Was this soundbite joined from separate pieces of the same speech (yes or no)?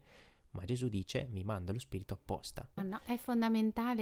yes